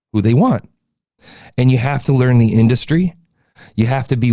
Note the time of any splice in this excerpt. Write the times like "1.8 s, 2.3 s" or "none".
none

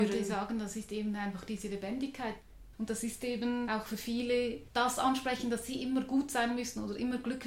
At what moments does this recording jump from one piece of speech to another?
2.7 s, 4.7 s

